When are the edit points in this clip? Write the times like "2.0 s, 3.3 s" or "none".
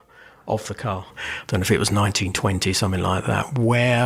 1.1 s

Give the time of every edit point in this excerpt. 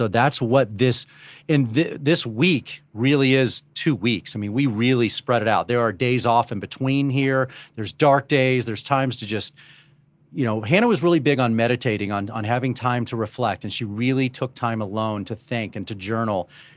none

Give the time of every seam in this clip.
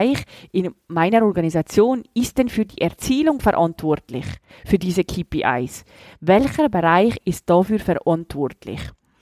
none

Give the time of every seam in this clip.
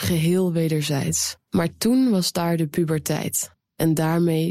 1.5 s

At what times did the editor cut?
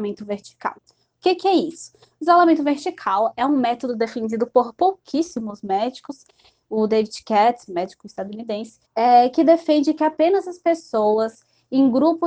7.7 s, 8.8 s

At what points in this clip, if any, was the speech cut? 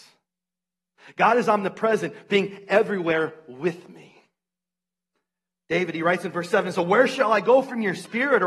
none

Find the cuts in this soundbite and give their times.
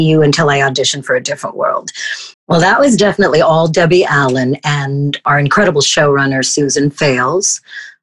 2.3 s

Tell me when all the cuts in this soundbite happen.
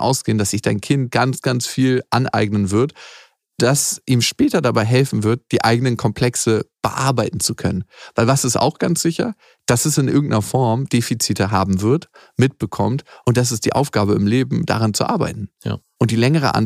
15.5 s

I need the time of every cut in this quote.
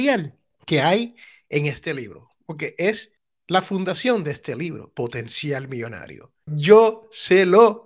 6.5 s

